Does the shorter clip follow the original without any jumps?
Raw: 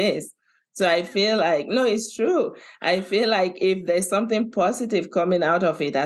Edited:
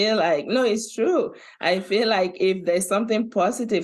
yes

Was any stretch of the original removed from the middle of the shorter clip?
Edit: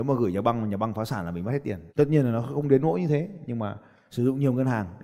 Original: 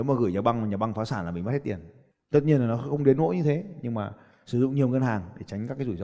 yes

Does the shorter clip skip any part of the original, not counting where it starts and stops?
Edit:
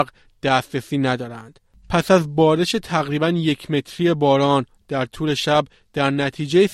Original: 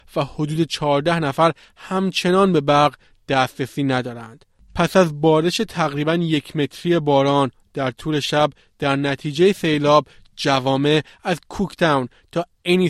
no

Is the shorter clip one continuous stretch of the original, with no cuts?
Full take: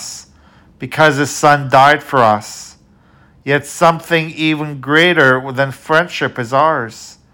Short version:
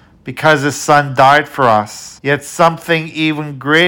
no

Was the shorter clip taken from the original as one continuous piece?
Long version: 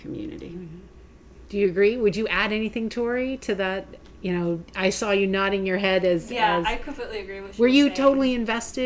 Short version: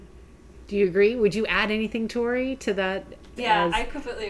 no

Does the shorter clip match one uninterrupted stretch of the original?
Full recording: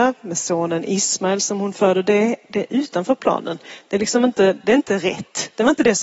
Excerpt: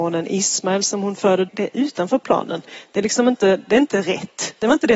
no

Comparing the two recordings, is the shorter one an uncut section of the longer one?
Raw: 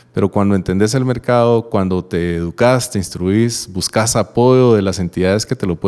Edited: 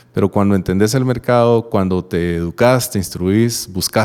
yes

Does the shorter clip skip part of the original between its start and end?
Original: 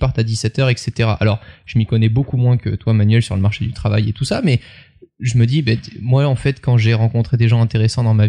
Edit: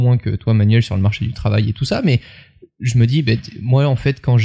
no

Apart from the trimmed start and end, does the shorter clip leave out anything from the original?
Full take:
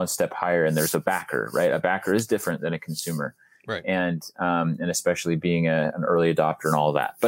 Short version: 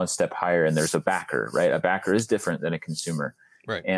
no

